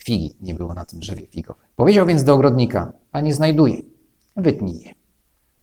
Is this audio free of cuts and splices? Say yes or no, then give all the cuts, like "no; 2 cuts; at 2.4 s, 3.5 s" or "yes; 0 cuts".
no; 2 cuts; at 1.7 s, 3.0 s